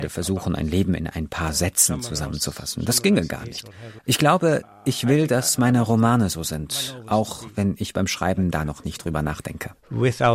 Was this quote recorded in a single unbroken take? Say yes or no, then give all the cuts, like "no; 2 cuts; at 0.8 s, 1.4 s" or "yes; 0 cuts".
no; 1 cut; at 4.0 s